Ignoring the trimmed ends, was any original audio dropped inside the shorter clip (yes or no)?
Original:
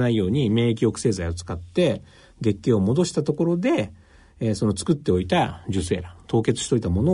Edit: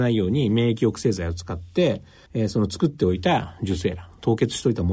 yes